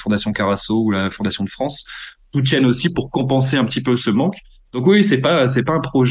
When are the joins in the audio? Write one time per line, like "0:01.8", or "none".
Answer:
none